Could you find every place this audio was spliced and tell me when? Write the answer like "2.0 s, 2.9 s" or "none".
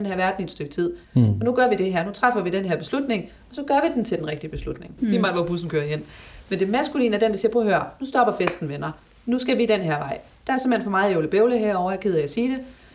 1.0 s, 5.0 s